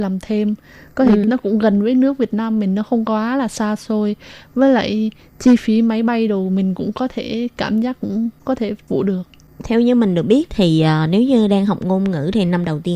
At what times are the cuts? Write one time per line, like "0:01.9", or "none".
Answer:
0:01.2